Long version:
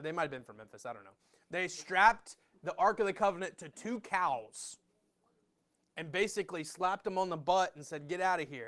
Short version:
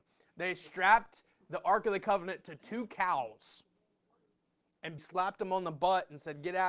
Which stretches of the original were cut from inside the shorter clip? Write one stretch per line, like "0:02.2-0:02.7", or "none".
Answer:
0:06.1-0:06.6